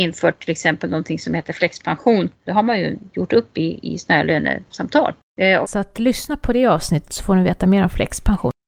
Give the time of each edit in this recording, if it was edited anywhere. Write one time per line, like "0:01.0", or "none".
0:02.5
0:05.6